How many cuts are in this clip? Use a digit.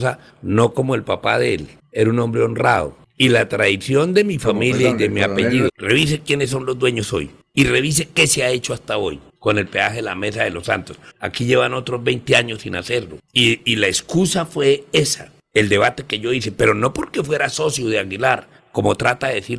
2